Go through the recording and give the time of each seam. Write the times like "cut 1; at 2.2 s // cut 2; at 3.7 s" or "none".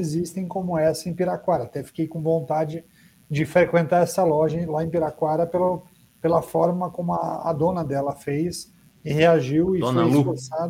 none